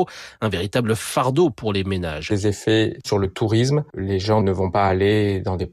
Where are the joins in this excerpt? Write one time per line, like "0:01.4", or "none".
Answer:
0:02.3